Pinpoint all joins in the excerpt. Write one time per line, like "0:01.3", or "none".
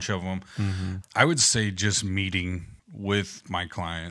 0:01.0
0:02.8